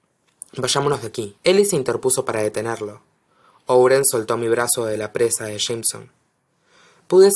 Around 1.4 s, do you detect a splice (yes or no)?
yes